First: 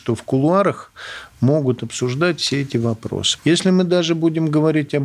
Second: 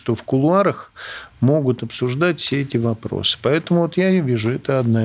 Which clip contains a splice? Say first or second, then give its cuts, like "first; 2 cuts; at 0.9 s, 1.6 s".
first; 1 cut; at 3.4 s